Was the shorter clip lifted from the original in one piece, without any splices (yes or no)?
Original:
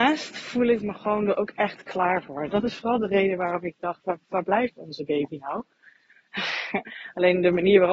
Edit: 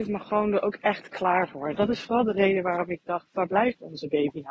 no